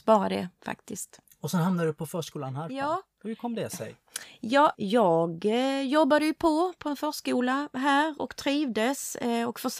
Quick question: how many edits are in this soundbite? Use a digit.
1